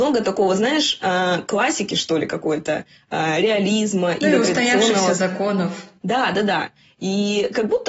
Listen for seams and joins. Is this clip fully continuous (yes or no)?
yes